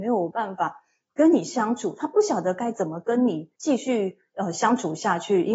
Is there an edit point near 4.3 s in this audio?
no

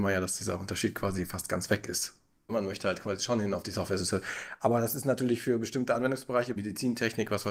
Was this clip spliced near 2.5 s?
yes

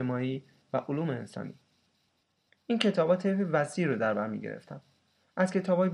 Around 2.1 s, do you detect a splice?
no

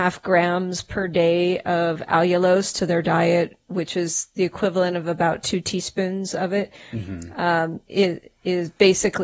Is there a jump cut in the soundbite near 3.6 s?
no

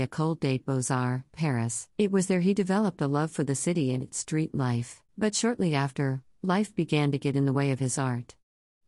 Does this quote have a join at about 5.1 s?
yes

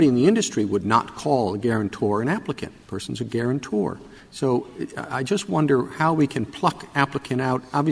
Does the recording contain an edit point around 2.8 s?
yes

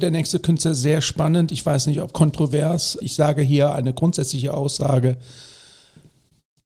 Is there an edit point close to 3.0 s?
yes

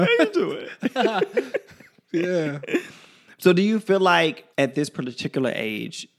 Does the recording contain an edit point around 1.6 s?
no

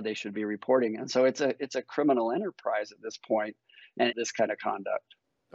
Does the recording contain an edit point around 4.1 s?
yes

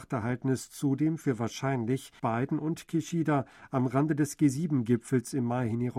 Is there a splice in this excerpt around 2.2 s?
yes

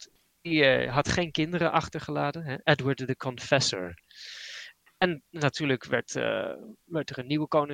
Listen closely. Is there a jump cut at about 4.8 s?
no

